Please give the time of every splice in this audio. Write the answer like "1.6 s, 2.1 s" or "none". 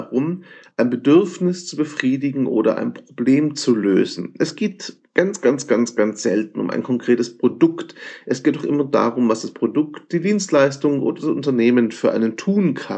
none

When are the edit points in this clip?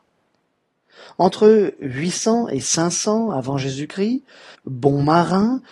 4.5 s

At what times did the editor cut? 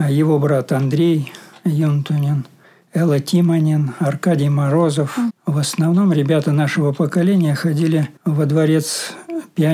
5.3 s, 8.2 s

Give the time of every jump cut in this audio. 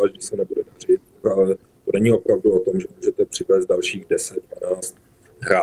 1.2 s

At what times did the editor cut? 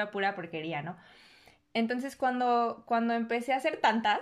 none

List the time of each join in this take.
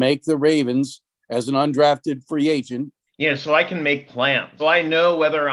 3.1 s, 4.6 s

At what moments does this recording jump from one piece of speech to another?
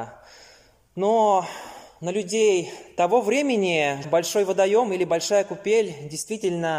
4.0 s

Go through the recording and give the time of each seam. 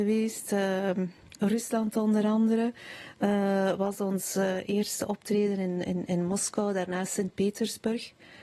none

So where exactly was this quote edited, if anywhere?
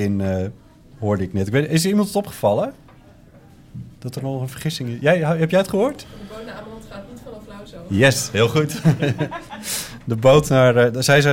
none

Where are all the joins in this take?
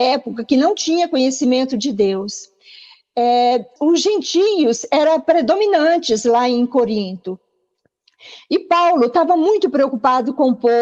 3.8 s

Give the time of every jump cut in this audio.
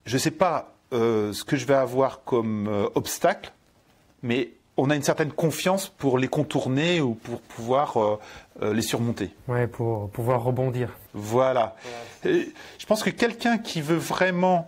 none

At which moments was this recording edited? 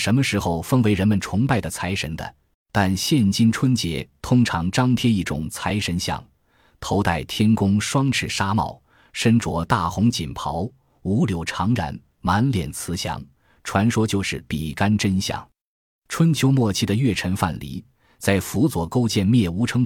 2.5 s

